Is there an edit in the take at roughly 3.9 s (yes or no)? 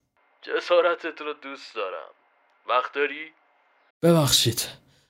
yes